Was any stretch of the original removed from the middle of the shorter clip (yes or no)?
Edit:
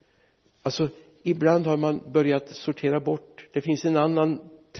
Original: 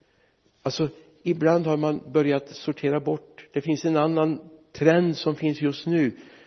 no